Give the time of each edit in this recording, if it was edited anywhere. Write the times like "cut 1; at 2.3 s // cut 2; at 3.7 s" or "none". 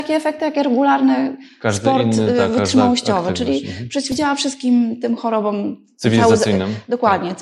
none